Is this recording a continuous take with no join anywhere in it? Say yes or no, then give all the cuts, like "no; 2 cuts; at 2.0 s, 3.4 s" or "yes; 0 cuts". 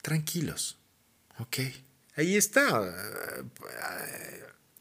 no; 1 cut; at 2.0 s